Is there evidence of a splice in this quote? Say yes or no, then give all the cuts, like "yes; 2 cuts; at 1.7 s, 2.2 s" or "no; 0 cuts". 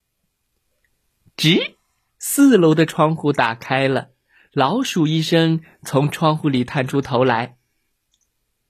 no; 0 cuts